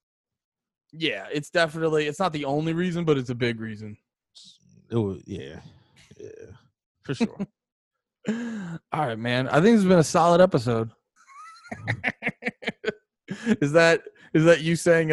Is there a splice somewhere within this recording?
yes; 1 cut; at 11.2 s

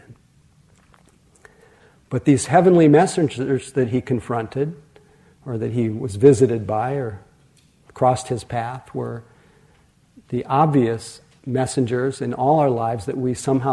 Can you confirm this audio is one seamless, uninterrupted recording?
yes; 0 cuts

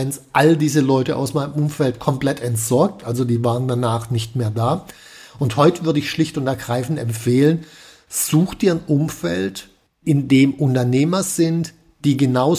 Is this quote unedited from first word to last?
yes; 0 cuts

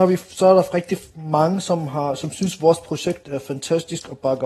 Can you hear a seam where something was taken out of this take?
no; 0 cuts

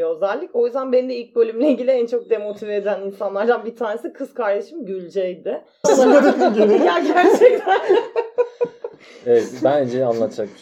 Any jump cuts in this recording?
yes; 1 cut; at 5.8 s

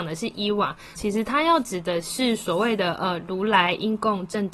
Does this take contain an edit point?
yes; 1 cut; at 1.0 s

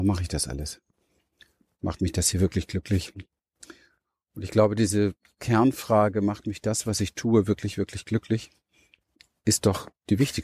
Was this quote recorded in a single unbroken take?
yes; 0 cuts

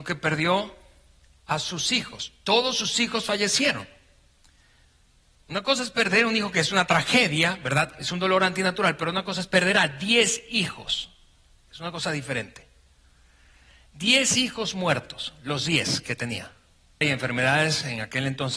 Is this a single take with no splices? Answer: no; 1 cut; at 17.0 s

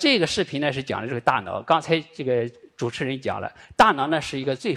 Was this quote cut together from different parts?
no; 0 cuts

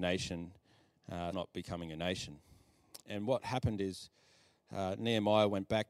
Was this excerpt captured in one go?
no; 2 cuts; at 1.3 s, 3.0 s

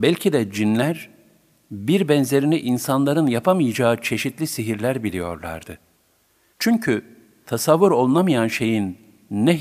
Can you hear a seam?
yes; 1 cut; at 6.5 s

